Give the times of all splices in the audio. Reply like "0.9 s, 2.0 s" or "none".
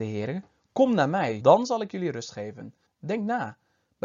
1.4 s, 2.9 s